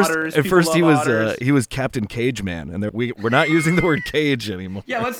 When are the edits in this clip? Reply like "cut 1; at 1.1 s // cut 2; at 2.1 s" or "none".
cut 1; at 2.9 s